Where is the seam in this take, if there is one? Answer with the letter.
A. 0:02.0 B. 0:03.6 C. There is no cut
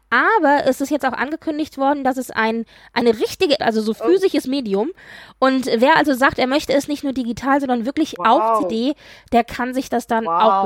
B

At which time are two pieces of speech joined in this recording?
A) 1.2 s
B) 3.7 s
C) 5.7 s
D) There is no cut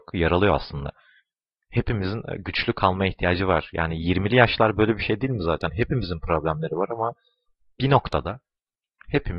D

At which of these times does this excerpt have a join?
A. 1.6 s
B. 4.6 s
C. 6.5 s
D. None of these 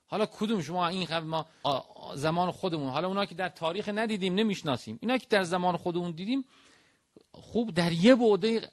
A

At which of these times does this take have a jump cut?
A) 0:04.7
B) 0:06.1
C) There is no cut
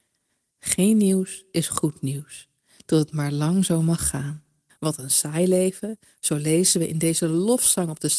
A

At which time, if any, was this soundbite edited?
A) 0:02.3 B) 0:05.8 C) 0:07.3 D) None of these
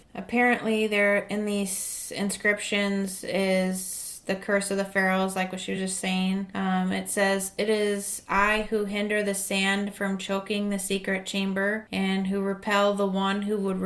D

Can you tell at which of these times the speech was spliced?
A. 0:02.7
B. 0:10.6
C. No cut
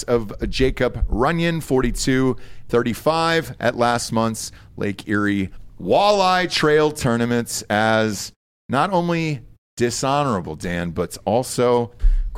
A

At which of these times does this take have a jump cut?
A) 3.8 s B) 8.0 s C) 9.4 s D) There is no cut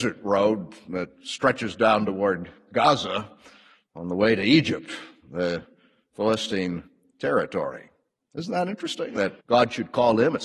C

